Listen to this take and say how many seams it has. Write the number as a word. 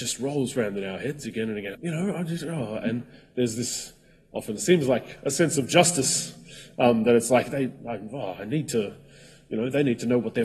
one